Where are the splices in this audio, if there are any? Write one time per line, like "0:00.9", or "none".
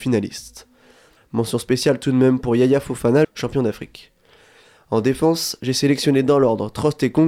0:01.2
0:03.2